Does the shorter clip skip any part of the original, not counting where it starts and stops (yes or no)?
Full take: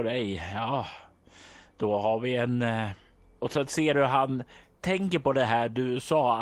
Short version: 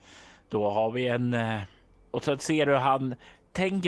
no